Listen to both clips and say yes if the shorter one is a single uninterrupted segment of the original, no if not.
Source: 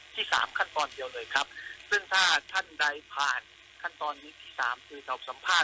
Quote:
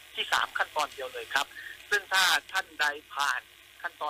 yes